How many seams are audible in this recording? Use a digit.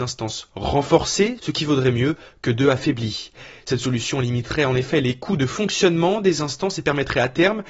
1